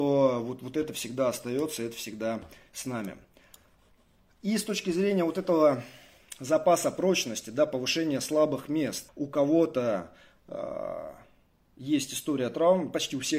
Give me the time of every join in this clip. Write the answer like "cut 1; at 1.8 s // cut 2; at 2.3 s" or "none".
cut 1; at 9.1 s